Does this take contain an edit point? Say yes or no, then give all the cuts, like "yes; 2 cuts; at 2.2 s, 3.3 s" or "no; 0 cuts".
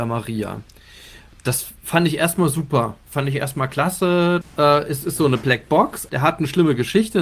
yes; 2 cuts; at 4.4 s, 6.1 s